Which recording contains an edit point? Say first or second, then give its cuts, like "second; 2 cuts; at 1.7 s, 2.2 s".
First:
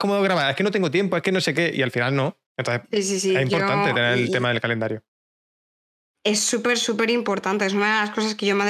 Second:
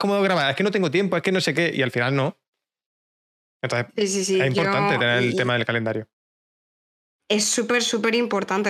first; 1 cut; at 2.5 s